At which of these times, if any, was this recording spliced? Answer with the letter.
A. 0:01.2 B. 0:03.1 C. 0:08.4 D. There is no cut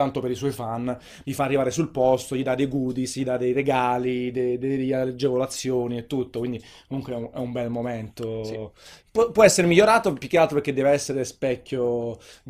A